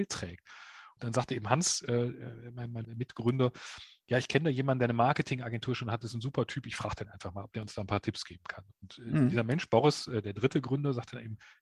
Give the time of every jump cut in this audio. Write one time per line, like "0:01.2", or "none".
0:02.8